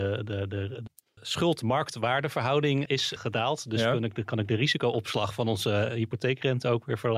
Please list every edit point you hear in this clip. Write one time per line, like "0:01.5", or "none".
0:02.9